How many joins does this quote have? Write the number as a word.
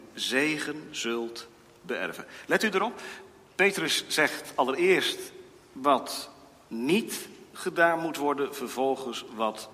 zero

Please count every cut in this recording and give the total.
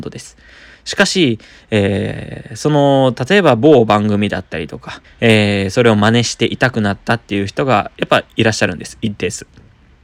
one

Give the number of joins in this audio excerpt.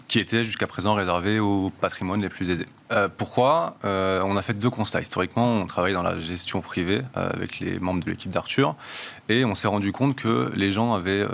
one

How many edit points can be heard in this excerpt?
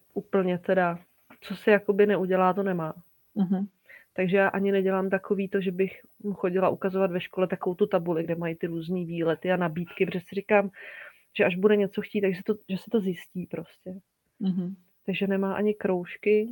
zero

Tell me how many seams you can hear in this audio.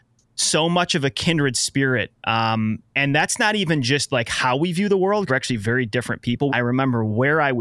two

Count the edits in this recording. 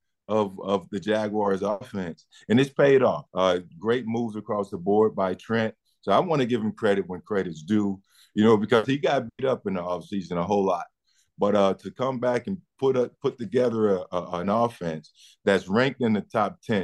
one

